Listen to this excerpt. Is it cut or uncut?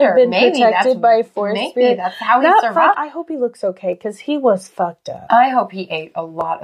cut